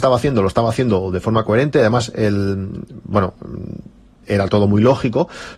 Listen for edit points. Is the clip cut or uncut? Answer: uncut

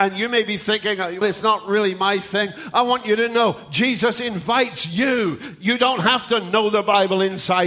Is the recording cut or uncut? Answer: cut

